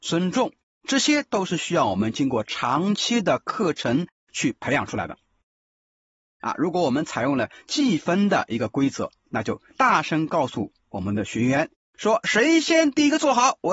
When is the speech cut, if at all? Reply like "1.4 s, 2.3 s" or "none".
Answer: 6.4 s